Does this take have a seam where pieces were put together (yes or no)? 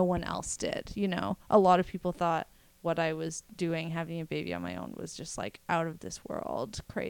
no